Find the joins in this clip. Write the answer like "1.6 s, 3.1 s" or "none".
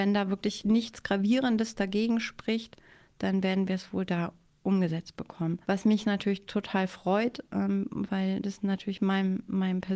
5.6 s